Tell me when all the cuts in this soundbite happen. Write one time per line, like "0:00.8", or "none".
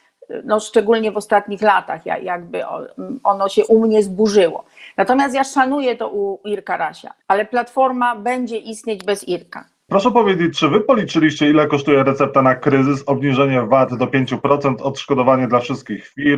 0:07.2
0:09.9